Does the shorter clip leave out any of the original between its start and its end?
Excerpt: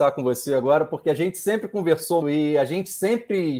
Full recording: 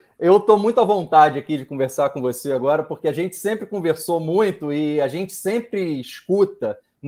yes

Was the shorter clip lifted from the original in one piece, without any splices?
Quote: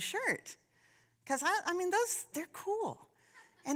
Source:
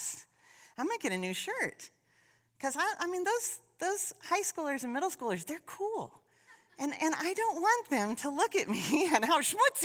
no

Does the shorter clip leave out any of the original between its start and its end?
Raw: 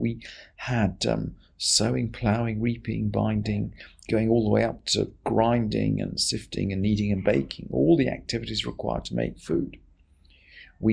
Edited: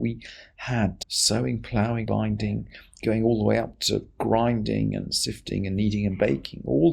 yes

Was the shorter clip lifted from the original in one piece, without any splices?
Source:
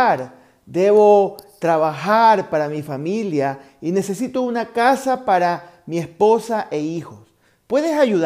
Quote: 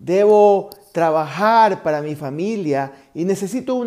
yes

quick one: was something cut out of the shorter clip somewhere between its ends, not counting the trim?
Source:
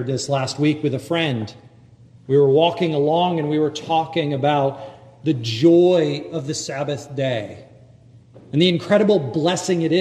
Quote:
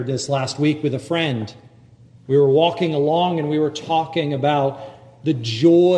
no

